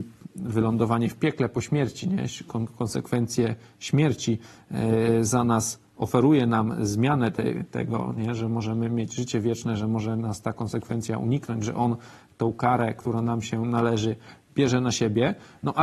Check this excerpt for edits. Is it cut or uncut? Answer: uncut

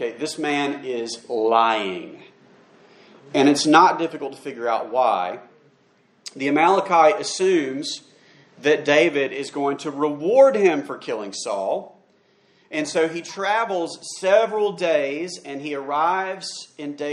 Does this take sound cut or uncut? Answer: uncut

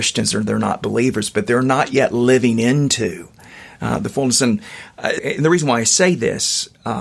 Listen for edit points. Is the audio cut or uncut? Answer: cut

